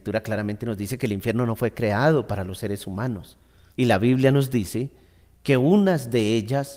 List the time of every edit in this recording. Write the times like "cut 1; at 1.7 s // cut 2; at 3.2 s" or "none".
cut 1; at 3.7 s